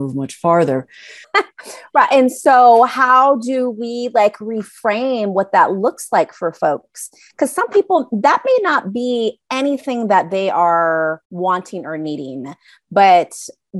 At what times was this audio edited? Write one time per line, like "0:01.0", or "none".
0:01.2
0:11.2